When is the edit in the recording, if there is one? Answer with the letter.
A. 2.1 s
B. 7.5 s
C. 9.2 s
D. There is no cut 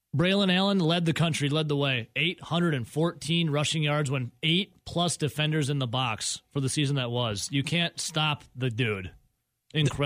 D